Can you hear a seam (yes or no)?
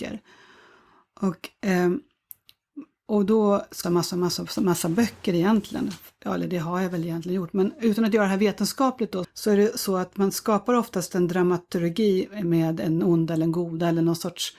yes